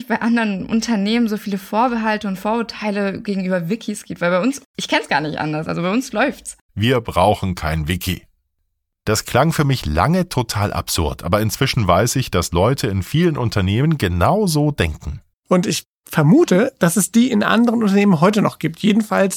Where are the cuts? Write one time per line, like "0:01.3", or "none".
0:06.7
0:15.3